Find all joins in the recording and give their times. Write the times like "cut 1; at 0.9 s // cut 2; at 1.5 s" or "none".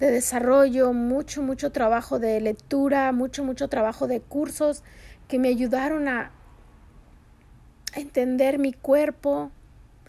none